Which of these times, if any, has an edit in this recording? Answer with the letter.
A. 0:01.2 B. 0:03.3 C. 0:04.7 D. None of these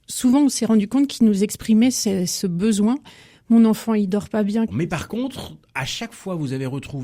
C